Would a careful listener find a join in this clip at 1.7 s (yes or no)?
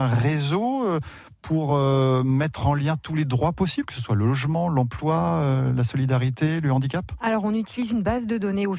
no